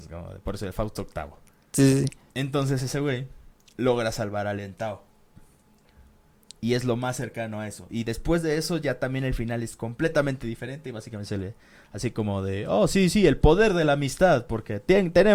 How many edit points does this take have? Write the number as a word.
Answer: zero